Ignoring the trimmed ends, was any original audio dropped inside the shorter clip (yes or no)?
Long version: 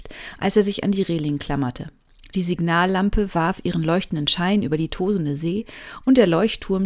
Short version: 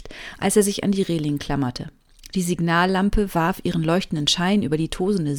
no